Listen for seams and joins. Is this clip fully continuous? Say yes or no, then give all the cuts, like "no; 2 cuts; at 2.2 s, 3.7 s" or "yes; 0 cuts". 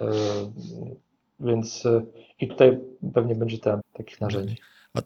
no; 2 cuts; at 2.5 s, 3.8 s